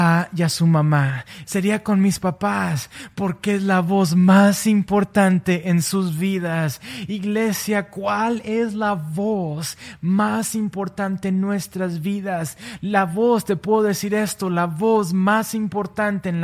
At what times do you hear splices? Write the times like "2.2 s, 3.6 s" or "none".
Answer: 1.4 s